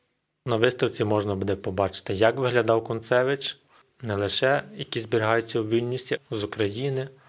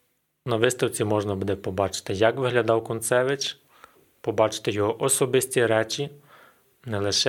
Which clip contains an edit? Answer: first; 2 cuts; at 3.8 s, 6.2 s

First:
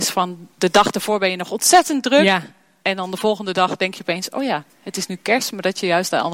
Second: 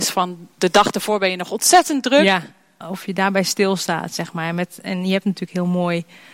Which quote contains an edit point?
second; 1 cut; at 2.8 s

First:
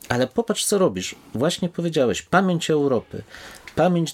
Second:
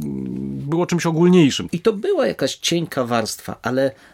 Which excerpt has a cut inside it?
second; 1 cut; at 1.7 s

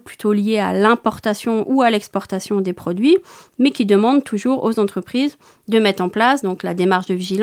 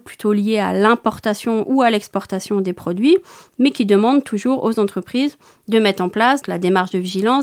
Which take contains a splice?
second; 1 cut; at 6.4 s

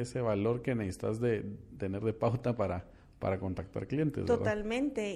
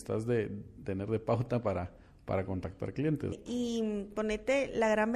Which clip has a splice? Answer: second; 1 cut; at 3.3 s

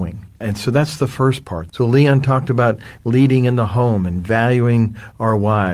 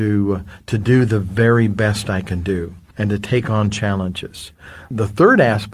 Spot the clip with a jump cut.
first; 1 cut; at 1.7 s

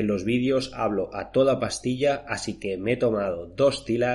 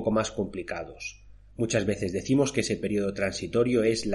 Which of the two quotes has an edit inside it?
second; 1 cut; at 1.5 s

